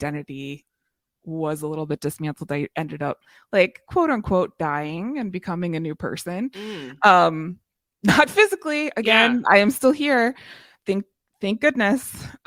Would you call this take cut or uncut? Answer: uncut